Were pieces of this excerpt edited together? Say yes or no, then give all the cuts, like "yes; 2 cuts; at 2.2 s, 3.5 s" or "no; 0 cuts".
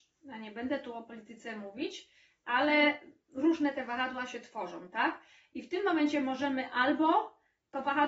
no; 0 cuts